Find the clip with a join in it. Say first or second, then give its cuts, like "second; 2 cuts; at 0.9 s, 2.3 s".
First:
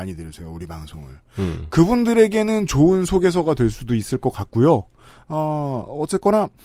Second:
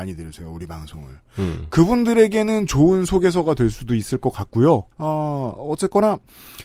second; 1 cut; at 4.9 s